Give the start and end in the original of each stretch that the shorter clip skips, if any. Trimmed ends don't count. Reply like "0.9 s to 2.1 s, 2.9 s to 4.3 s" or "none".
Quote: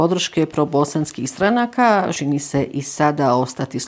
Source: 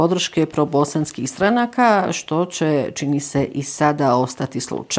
2.1 s to 2.9 s